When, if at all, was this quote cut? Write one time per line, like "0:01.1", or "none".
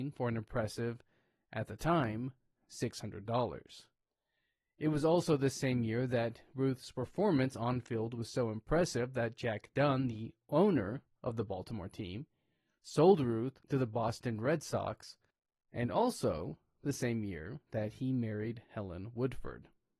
none